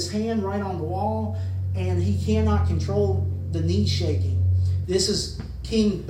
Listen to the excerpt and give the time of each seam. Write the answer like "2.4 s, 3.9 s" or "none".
4.8 s